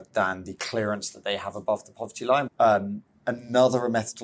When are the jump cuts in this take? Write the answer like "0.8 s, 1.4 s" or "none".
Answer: 2.5 s